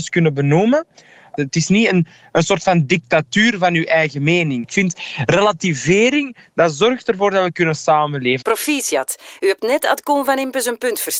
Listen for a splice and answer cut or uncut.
cut